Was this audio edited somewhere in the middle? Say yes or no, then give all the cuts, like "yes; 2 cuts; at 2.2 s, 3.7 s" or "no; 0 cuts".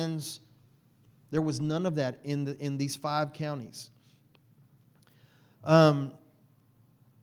no; 0 cuts